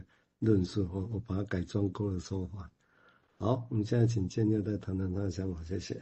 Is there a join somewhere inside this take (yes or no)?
no